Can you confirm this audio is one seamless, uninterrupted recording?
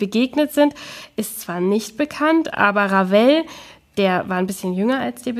yes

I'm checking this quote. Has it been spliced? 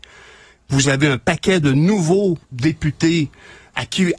yes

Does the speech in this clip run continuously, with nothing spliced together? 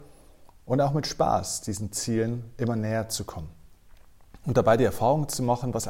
yes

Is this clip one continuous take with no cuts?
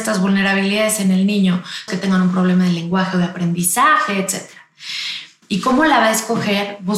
no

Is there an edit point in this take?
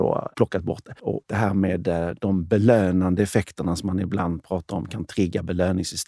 yes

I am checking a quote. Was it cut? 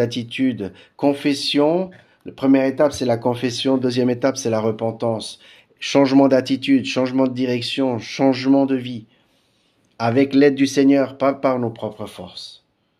no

